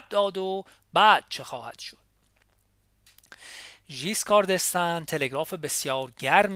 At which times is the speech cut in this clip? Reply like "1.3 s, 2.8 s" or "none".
none